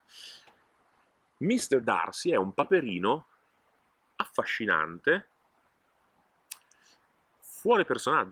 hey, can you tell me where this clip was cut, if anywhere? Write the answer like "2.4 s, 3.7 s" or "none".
1.8 s